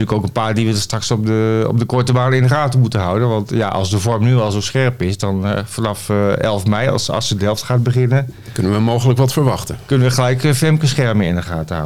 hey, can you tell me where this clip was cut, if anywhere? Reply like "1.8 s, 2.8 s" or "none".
none